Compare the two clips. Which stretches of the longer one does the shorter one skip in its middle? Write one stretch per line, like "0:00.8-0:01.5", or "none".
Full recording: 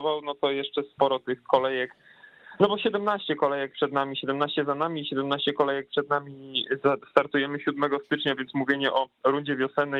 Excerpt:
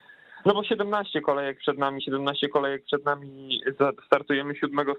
0:04.1-0:05.0